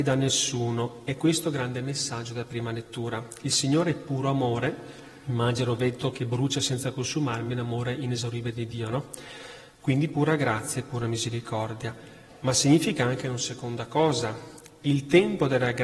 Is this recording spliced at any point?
no; 0 cuts

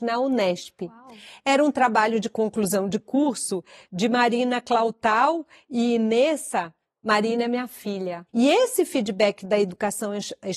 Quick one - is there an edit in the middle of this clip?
yes; 1 cut; at 8.3 s

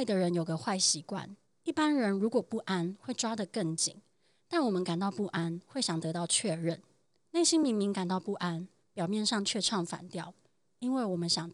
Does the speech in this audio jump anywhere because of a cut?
no; 0 cuts

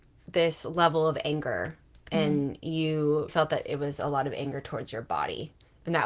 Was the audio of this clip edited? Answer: yes; 1 cut; at 3.3 s

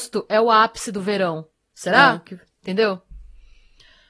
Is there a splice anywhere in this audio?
yes; 1 cut; at 1.6 s

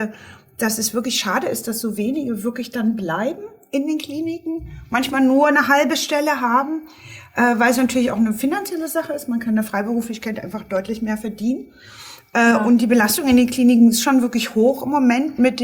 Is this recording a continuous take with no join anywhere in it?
yes; 0 cuts

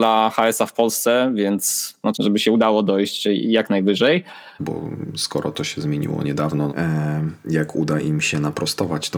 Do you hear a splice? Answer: yes; 3 cuts; at 2.1 s, 4.6 s, 6.7 s

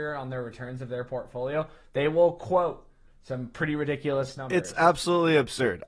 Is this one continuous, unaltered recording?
yes; 0 cuts

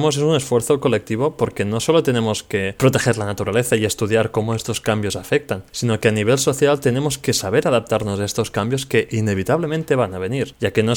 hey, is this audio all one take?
yes; 0 cuts

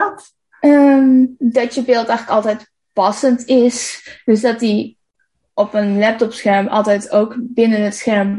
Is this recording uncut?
yes; 0 cuts

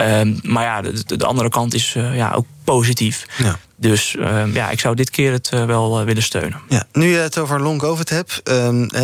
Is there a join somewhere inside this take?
no; 0 cuts

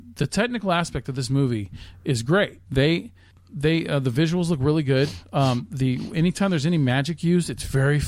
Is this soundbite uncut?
no; 1 cut; at 2.7 s

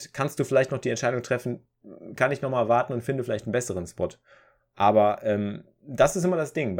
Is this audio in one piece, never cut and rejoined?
yes; 0 cuts

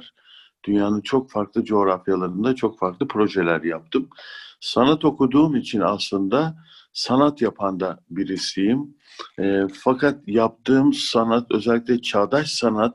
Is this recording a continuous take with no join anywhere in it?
yes; 0 cuts

